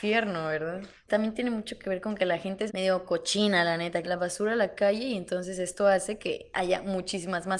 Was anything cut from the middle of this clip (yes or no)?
yes